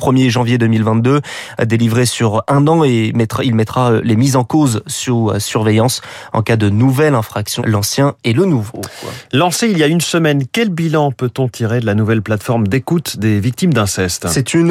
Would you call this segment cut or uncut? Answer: cut